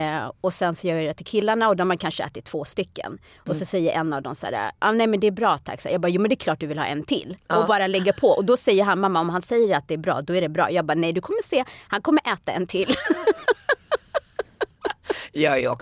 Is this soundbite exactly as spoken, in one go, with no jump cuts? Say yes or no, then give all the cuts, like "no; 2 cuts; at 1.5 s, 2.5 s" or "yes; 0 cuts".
yes; 0 cuts